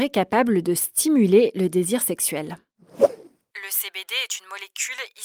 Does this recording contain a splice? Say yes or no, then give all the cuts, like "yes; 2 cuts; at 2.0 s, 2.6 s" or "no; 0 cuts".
yes; 1 cut; at 3.5 s